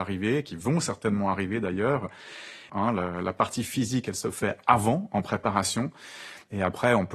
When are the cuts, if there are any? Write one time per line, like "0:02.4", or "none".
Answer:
0:02.7